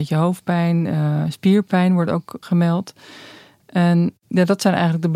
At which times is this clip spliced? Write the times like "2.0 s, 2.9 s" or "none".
2.4 s